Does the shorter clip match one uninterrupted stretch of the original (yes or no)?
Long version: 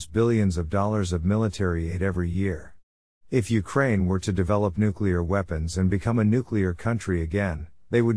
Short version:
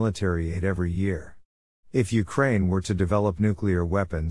yes